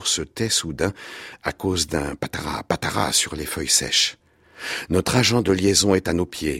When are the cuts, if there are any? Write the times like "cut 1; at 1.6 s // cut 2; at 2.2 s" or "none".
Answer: cut 1; at 2.2 s

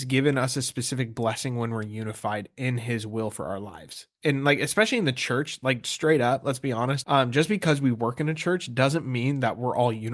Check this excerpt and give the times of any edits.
cut 1; at 7.0 s

